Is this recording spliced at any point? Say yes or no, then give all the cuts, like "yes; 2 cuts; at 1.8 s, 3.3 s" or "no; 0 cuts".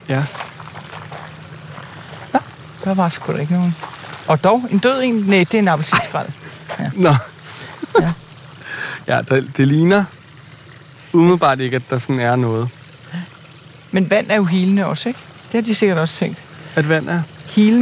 no; 0 cuts